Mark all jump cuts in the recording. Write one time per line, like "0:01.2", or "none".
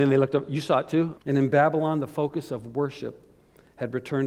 0:01.1